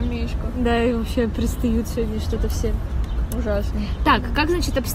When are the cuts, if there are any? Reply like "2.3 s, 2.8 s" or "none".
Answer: none